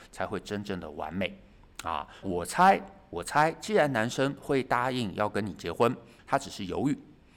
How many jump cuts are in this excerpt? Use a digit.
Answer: 2